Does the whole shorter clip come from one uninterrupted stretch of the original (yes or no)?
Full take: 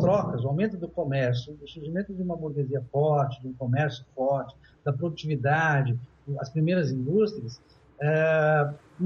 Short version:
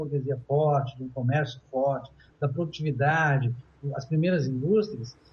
yes